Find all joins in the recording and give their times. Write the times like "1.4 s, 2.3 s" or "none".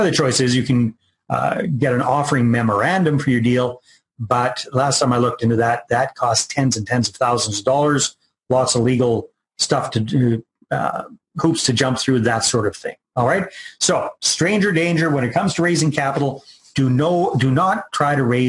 none